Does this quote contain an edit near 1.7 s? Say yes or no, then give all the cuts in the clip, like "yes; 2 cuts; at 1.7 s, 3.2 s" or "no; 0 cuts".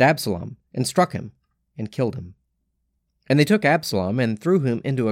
no; 1 cut; at 3.1 s